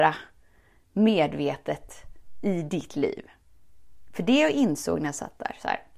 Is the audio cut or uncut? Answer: uncut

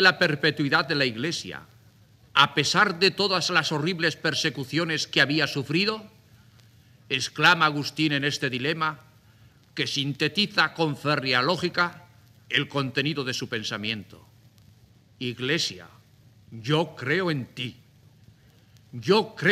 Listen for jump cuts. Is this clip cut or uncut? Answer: uncut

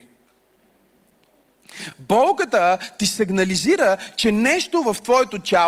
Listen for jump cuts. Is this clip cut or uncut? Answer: uncut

